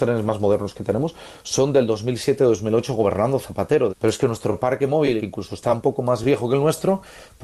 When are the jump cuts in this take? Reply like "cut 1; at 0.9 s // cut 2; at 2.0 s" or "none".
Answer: cut 1; at 3.9 s // cut 2; at 5.2 s